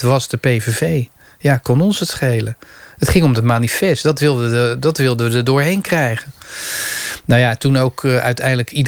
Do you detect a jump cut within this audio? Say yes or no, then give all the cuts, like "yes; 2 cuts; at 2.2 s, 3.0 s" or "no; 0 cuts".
no; 0 cuts